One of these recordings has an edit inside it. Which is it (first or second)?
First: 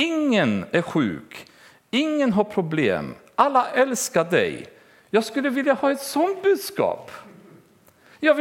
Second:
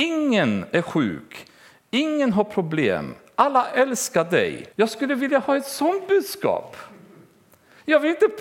second